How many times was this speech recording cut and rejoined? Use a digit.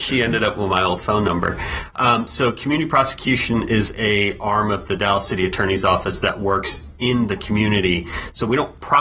0